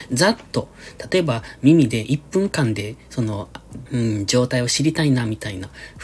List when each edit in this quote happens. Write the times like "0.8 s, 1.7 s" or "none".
3.9 s